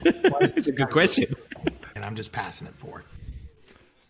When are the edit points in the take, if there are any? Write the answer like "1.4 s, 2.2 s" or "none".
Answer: 2.0 s